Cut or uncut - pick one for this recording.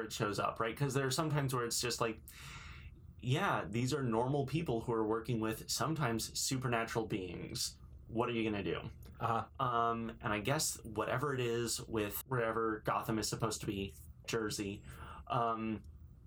cut